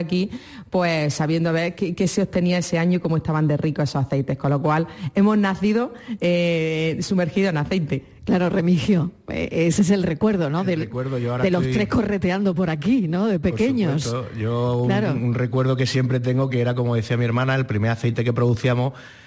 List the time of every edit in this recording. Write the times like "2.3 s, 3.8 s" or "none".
none